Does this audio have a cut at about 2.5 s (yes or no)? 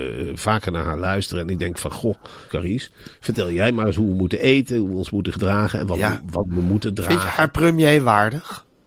yes